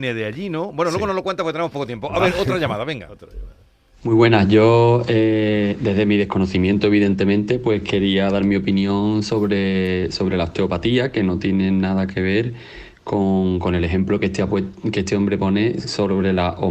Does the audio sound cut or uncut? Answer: uncut